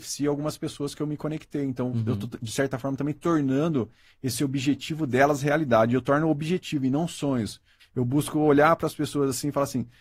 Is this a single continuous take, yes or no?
no